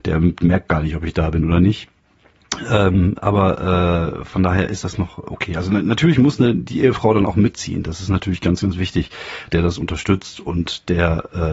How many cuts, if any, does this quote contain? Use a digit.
1